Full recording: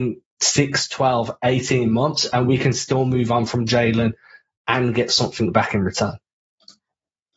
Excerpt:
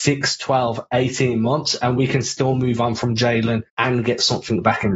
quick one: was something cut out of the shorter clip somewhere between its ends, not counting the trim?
yes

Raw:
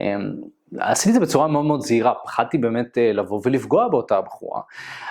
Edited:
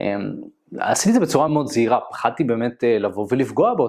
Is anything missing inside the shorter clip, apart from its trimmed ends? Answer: yes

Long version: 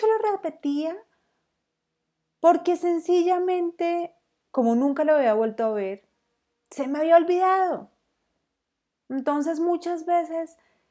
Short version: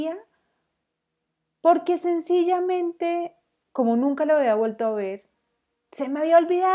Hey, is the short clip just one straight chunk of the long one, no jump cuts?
yes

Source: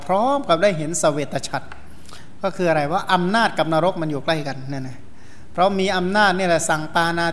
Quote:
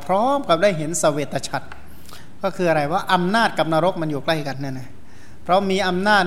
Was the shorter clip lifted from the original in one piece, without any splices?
no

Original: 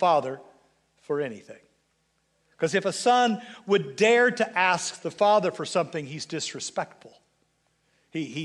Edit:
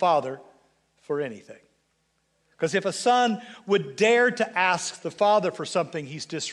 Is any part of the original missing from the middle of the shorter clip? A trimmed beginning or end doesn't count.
no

